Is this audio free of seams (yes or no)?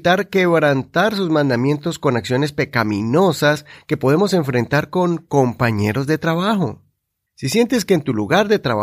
no